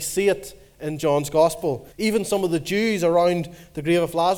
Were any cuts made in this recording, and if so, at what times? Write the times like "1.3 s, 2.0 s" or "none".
1.9 s